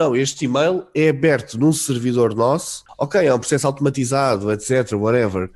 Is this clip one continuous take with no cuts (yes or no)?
no